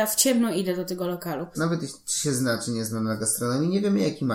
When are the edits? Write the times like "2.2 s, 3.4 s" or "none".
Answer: 1.5 s